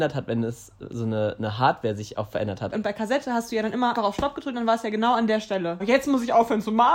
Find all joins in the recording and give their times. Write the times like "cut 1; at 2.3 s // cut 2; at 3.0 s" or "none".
cut 1; at 2.7 s // cut 2; at 3.9 s // cut 3; at 5.8 s